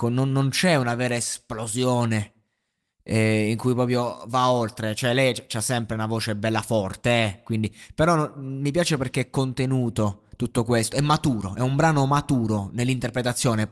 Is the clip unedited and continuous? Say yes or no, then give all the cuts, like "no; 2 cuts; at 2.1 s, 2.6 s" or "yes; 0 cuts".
yes; 0 cuts